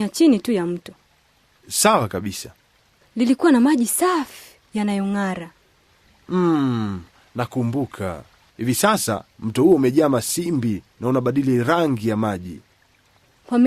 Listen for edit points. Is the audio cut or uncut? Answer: cut